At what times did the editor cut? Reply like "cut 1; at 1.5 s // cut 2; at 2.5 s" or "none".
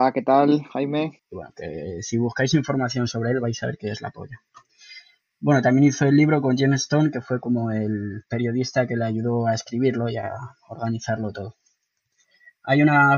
cut 1; at 1.2 s